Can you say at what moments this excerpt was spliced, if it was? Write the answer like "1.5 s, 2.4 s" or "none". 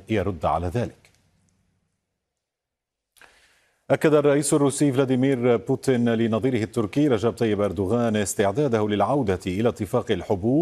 none